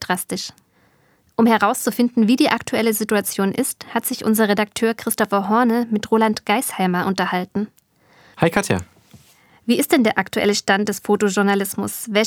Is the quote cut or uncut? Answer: cut